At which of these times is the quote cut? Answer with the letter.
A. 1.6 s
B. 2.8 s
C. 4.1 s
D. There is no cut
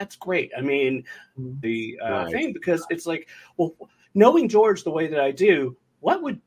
A